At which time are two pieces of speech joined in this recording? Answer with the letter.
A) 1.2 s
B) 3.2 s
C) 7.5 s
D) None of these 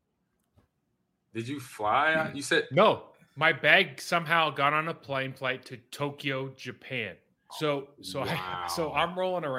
C